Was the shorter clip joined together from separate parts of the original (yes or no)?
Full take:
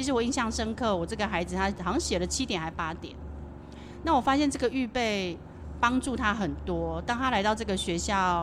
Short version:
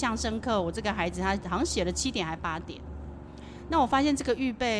no